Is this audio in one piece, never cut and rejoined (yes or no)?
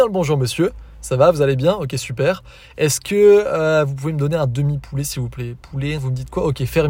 no